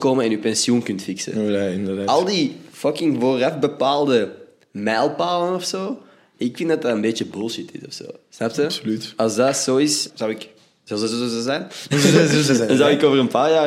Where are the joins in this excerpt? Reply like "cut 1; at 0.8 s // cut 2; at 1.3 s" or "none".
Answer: cut 1; at 10.1 s